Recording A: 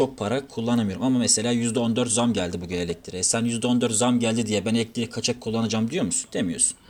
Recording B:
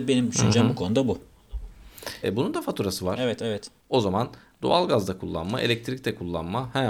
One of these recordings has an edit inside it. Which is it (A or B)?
B